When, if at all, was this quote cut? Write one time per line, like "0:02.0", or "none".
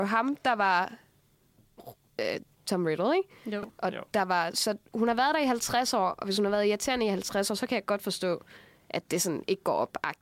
0:04.5